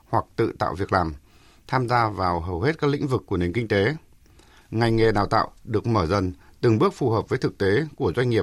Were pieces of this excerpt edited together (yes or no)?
yes